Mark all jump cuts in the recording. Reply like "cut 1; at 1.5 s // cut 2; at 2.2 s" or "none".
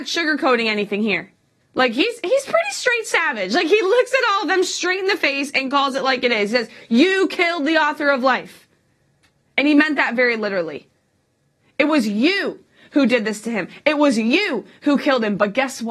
none